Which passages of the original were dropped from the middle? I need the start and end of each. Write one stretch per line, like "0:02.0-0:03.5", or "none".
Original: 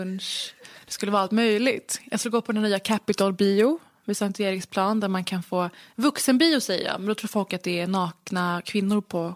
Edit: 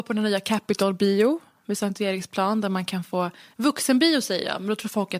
none